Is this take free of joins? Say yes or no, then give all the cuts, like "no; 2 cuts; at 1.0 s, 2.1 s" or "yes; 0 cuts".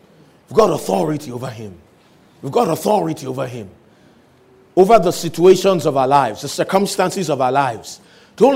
yes; 0 cuts